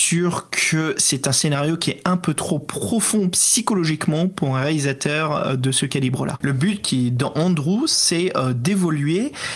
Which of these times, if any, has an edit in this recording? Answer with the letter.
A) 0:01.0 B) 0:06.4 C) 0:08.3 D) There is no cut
B